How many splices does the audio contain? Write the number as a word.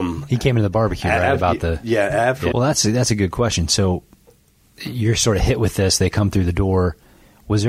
one